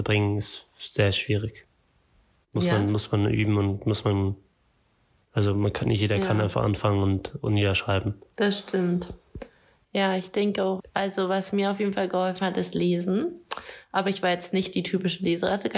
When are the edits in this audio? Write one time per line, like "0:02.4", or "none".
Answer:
0:10.8

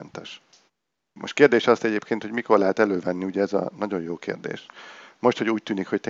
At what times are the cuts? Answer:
0:01.2

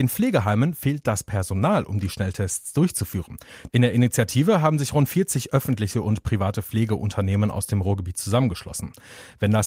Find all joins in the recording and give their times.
0:03.7

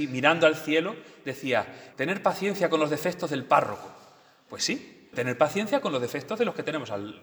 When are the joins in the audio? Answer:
0:01.9
0:05.1

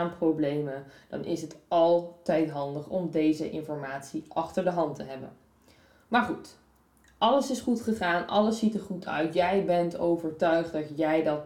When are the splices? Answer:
none

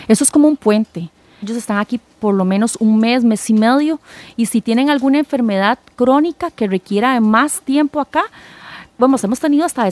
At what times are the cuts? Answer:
0:01.4
0:08.9

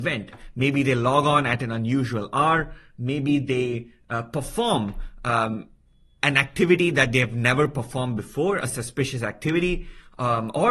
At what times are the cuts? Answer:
none

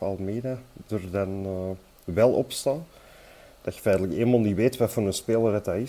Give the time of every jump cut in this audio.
none

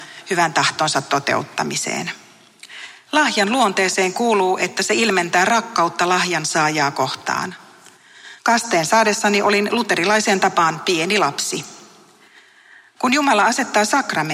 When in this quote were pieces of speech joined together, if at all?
0:03.1
0:08.4
0:13.0

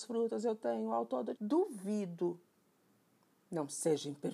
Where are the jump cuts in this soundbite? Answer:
0:01.3

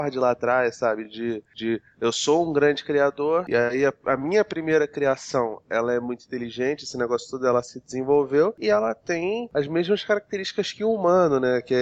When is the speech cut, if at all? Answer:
none

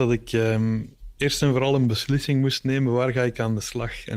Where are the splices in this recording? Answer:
none

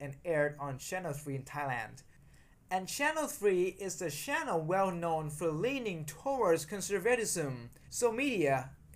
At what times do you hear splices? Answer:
0:07.8

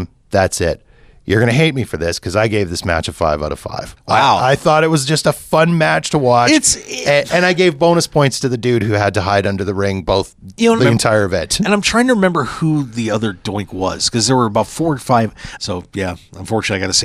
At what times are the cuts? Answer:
0:10.8
0:15.6

